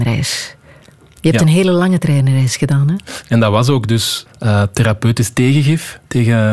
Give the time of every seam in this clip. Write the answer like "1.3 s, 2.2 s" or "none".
3.2 s, 4.3 s